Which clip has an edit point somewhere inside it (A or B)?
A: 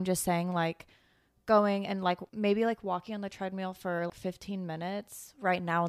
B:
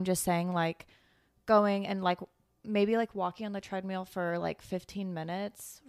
A